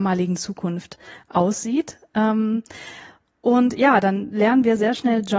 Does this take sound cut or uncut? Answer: uncut